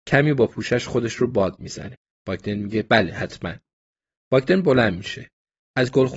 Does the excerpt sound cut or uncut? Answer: cut